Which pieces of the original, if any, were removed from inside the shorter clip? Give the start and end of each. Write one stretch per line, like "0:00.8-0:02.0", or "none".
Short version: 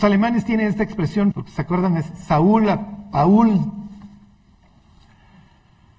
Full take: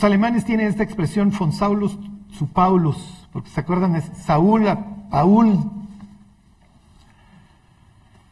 0:01.3-0:03.3